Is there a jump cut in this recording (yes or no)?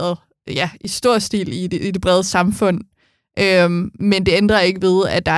no